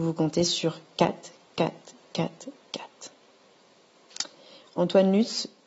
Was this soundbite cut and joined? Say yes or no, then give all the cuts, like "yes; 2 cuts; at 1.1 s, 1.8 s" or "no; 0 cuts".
no; 0 cuts